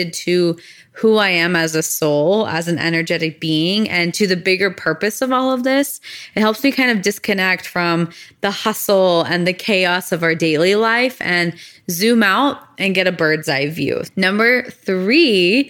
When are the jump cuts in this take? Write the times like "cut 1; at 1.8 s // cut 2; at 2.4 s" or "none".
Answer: cut 1; at 14.0 s